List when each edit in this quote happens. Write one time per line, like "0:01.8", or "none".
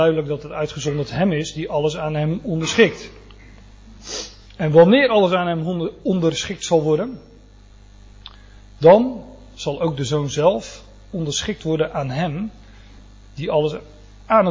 none

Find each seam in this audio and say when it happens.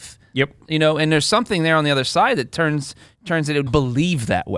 0:03.7

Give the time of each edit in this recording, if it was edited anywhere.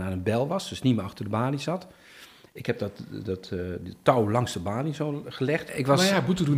0:05.7

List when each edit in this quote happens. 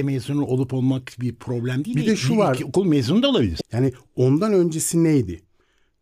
0:03.6

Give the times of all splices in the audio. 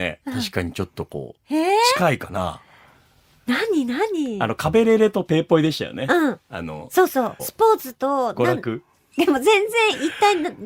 0:07.4
0:09.1

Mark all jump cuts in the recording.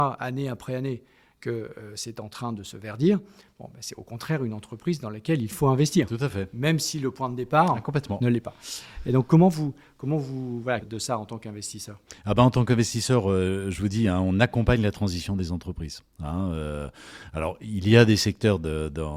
0:10.8

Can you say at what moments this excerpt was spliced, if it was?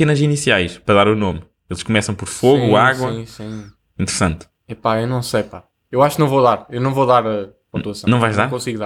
none

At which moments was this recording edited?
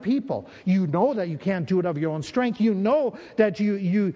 none

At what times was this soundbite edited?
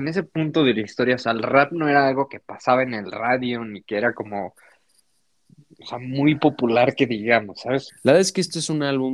0:07.9

